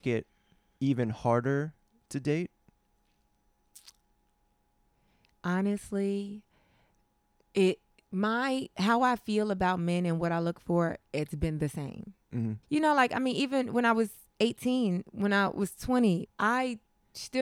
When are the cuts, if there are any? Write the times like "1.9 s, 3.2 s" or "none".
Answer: 12.6 s, 16.3 s